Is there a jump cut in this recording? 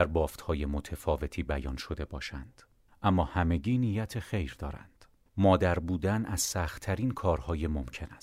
yes; 1 cut; at 5.3 s

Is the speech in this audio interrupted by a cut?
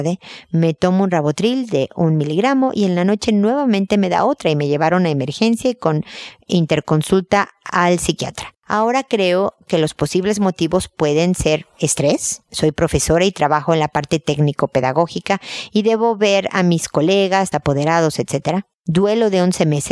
yes; 2 cuts; at 8.6 s, 17.5 s

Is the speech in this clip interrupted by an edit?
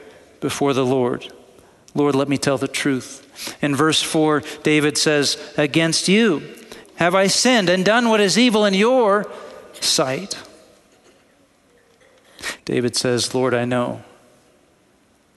yes; 2 cuts; at 6.8 s, 12.6 s

